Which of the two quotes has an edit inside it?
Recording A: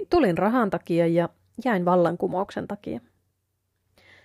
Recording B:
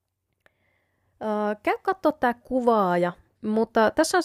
B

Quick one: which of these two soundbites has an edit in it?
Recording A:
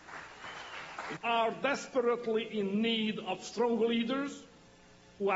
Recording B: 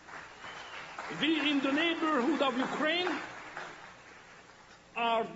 A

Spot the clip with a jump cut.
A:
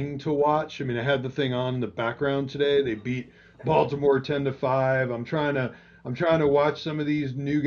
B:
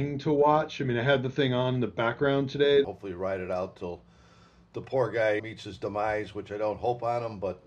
B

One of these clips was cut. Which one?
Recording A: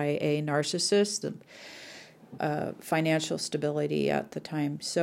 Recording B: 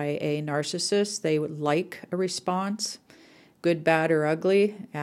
A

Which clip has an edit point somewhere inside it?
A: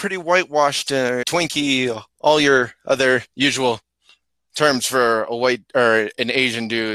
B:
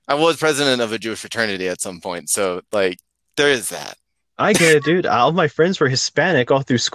A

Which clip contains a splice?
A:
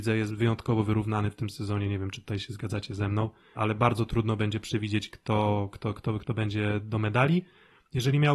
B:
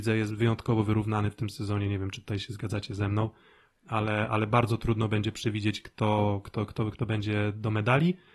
A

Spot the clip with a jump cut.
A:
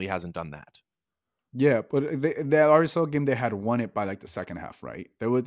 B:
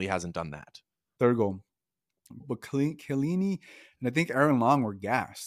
B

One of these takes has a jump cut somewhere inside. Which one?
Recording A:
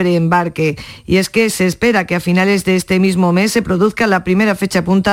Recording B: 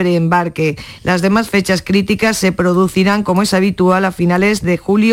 B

